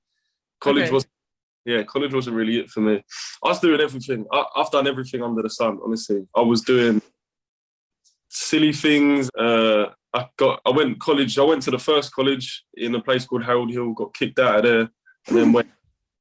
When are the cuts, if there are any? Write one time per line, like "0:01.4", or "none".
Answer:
0:09.3